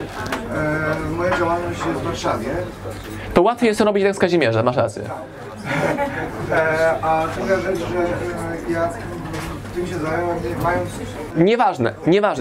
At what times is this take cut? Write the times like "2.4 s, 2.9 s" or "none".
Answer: 7.3 s, 11.3 s